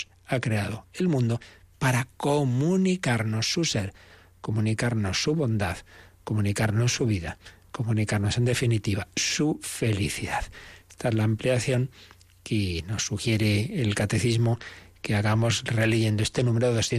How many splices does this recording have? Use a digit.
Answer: 0